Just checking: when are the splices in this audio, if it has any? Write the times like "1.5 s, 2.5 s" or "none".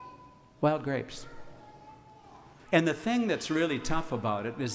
2.7 s